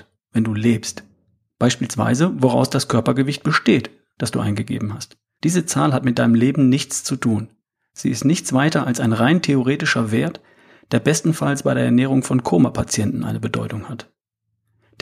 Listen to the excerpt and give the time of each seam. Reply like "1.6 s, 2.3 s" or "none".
1.5 s, 5.4 s